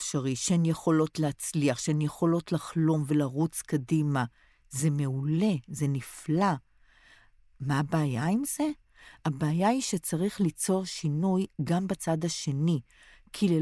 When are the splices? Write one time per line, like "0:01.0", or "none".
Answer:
none